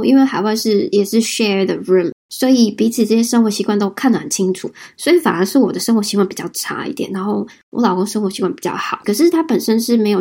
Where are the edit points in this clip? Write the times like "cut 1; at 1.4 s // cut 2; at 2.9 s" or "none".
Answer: cut 1; at 9.0 s